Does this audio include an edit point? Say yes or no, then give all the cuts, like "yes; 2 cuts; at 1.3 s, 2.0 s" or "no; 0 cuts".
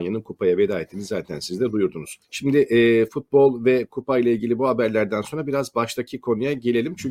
yes; 1 cut; at 2.2 s